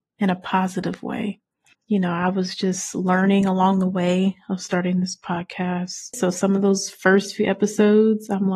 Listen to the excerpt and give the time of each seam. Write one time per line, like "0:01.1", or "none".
0:01.7
0:06.1

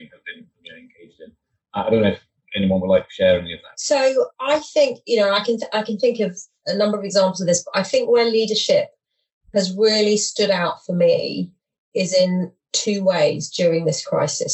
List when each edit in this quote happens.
none

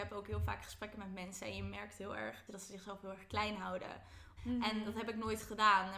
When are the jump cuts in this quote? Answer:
0:02.5
0:04.4

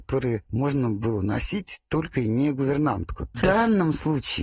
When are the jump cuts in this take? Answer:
0:03.3

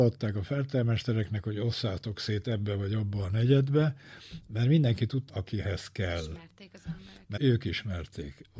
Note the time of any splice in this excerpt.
0:05.3
0:07.4

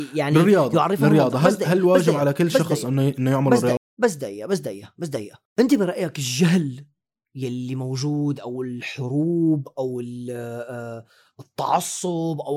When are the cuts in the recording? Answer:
0:03.8
0:05.5

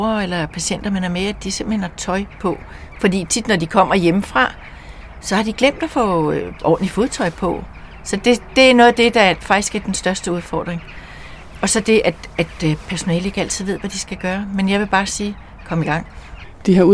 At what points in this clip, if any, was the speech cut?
none

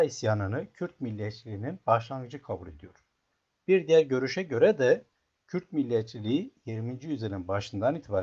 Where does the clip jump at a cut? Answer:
none

